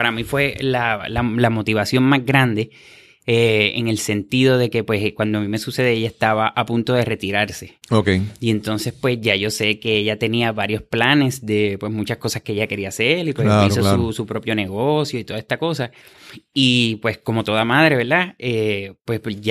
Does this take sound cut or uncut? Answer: uncut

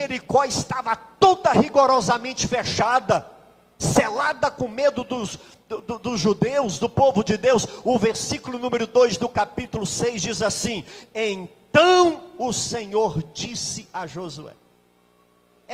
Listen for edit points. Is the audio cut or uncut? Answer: uncut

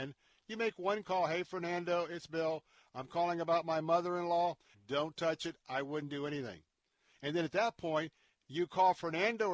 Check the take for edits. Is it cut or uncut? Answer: cut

